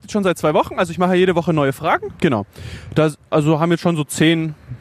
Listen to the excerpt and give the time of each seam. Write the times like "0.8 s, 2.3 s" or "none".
2.2 s

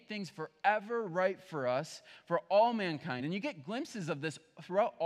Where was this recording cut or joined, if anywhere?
none

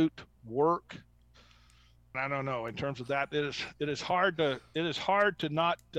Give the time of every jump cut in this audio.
2.1 s

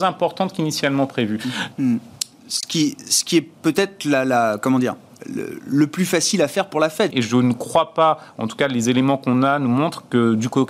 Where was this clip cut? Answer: 1.7 s, 7.1 s

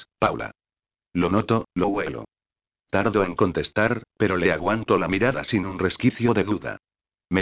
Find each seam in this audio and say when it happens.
1.7 s

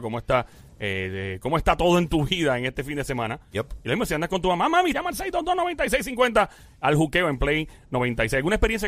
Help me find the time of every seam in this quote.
4.9 s

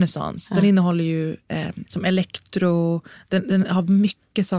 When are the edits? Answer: 1.9 s

